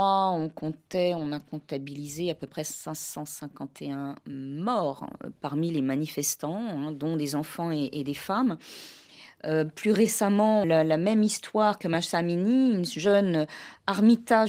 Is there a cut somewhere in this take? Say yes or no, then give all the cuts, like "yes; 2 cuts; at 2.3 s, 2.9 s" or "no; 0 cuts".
yes; 1 cut; at 10.6 s